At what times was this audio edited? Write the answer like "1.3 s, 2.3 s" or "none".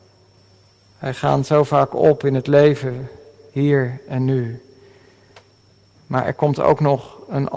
none